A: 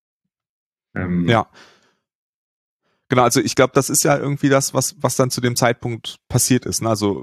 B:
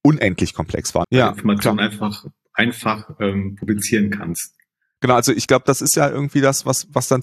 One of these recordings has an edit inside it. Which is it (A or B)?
B